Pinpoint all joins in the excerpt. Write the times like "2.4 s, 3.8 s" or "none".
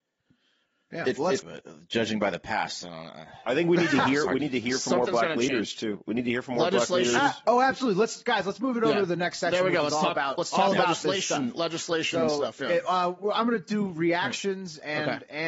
1.4 s